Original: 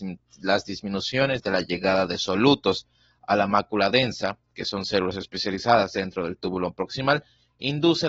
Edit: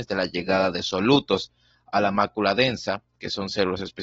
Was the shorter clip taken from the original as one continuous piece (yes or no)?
yes